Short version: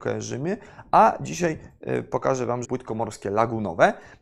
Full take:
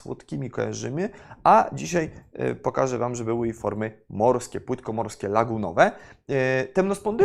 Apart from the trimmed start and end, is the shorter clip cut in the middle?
yes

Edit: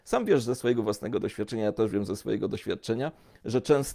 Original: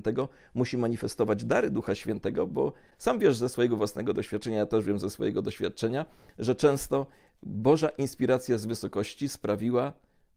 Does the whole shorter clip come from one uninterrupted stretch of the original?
yes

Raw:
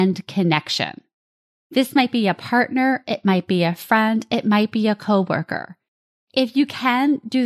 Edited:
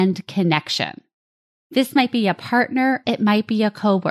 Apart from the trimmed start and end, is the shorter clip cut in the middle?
yes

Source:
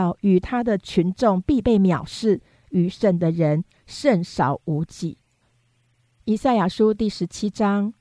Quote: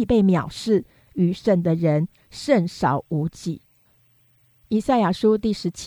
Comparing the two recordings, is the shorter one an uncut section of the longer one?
yes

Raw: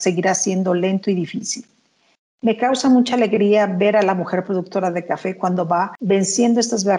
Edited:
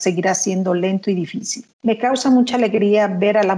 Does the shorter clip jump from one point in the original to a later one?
yes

